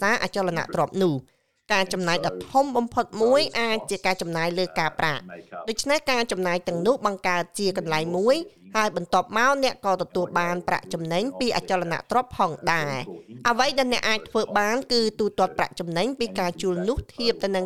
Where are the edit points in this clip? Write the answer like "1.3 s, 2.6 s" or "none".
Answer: none